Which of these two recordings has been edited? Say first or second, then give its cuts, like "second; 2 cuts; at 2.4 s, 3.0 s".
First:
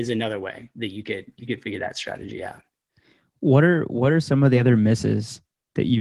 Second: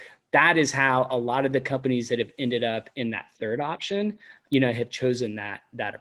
second; 1 cut; at 4.5 s